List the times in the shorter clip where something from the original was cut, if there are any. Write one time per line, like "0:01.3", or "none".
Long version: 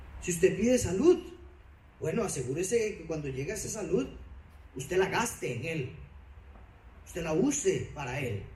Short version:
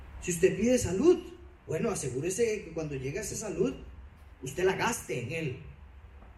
0:01.6